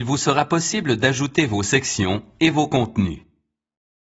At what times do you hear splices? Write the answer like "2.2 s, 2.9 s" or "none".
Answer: none